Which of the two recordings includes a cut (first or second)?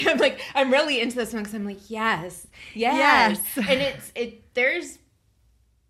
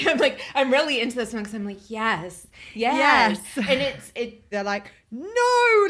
second